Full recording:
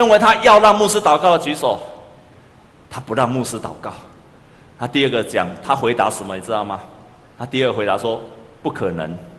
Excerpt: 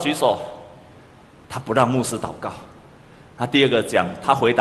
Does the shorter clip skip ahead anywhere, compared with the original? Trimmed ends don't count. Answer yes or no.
no